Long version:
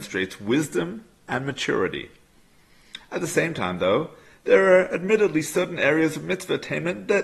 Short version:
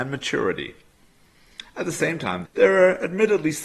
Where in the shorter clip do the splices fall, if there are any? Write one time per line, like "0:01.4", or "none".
0:02.4